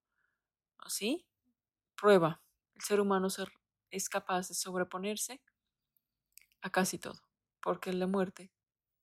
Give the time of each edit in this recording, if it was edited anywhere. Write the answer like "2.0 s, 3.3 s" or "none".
2.6 s, 7.5 s